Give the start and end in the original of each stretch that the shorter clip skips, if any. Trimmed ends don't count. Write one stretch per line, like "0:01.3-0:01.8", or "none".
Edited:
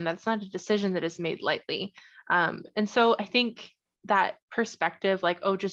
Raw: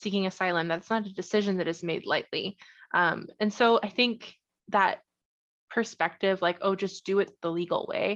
0:05.1-0:05.6